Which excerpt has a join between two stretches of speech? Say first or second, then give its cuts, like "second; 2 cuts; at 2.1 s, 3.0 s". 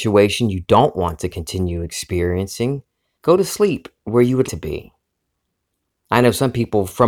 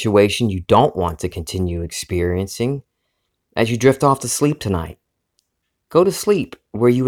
first; 2 cuts; at 3.1 s, 4.5 s